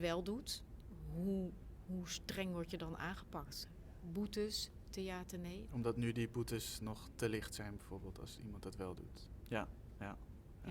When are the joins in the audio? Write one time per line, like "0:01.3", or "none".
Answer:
0:05.7
0:09.4